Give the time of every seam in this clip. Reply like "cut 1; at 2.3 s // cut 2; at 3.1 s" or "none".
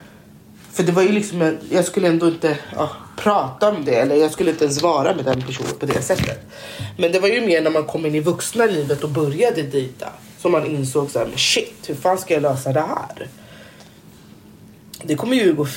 none